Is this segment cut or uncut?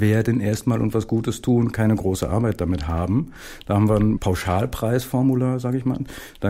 uncut